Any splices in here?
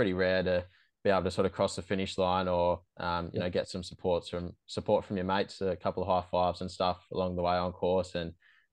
no; 0 cuts

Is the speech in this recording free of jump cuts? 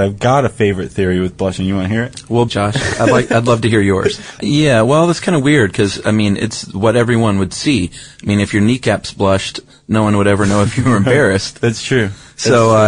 no; 2 cuts; at 2.5 s, 4.4 s

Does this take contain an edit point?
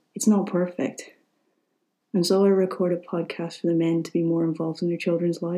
yes; 1 cut; at 2.0 s

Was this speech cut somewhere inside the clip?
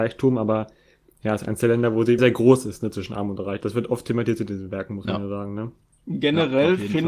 yes; 1 cut; at 2.2 s

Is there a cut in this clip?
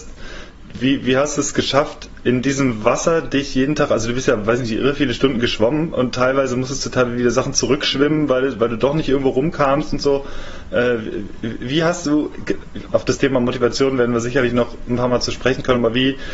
no; 0 cuts

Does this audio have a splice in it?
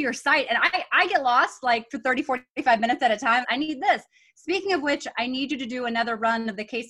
yes; 1 cut; at 3.4 s

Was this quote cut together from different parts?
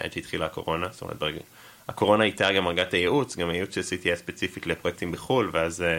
no; 0 cuts

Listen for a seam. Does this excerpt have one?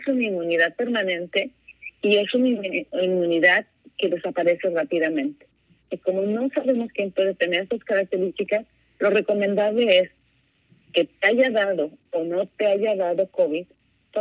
yes; 1 cut; at 5.8 s

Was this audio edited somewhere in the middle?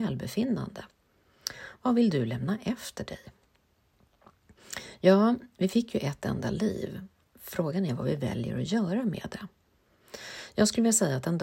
no; 0 cuts

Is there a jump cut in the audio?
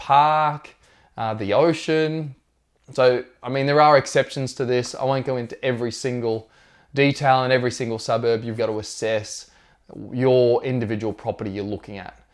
yes; 2 cuts; at 2.8 s, 8.6 s

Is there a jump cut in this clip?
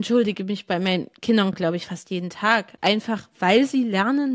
no; 0 cuts

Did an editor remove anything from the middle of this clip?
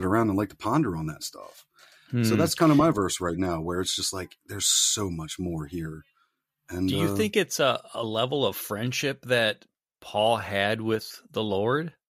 no; 0 cuts

